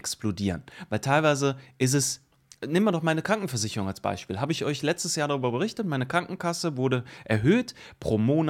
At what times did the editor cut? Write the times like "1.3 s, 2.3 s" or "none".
none